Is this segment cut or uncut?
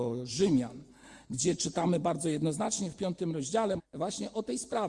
cut